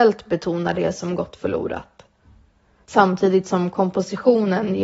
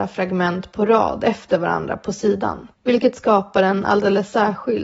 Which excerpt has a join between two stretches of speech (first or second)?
second